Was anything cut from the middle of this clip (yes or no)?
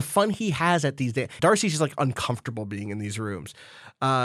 yes